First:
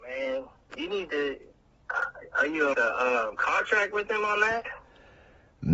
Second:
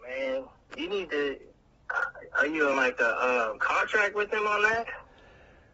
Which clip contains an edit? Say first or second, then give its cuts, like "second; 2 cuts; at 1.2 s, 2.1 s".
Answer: first; 1 cut; at 2.7 s